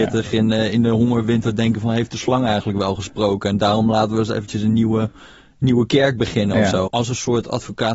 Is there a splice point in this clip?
yes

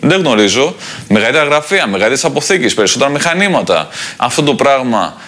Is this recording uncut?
no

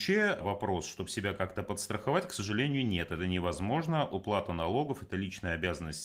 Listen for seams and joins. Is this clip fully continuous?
yes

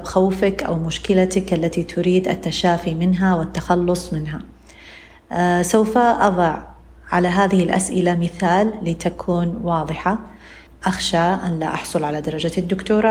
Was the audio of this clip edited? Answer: yes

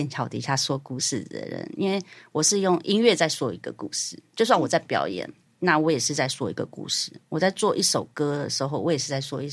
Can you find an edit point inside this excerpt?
no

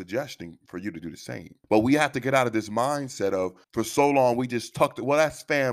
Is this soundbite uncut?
no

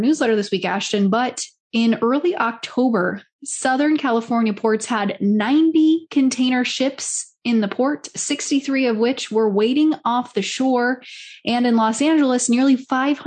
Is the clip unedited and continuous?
yes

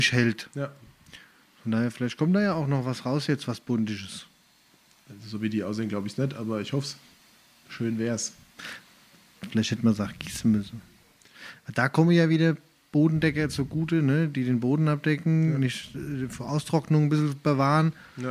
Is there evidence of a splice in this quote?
no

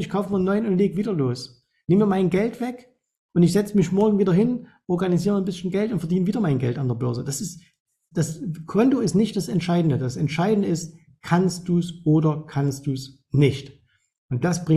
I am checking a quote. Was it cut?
yes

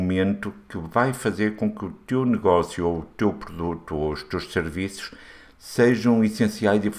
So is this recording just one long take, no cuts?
yes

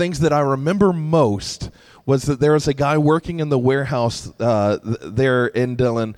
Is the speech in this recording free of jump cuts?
yes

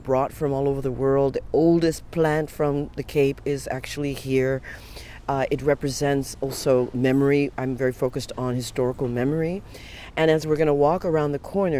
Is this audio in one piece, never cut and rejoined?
yes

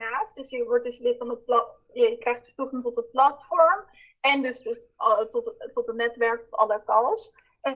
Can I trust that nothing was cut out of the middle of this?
yes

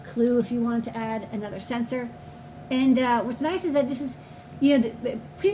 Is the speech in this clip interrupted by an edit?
no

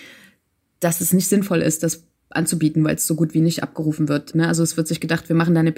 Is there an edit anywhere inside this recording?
yes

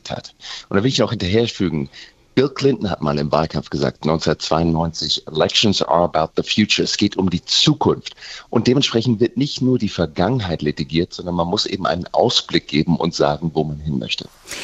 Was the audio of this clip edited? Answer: no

